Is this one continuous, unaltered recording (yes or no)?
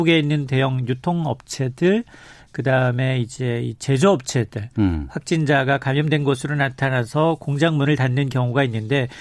yes